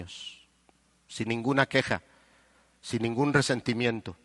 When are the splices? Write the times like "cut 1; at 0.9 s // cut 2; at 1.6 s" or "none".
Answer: none